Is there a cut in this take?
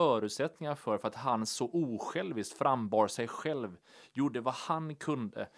no; 0 cuts

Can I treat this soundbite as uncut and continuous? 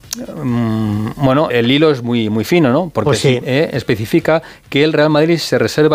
no; 2 cuts; at 1.5 s, 3.4 s

